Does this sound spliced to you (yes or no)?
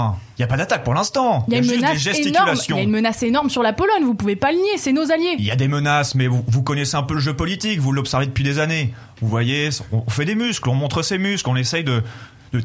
no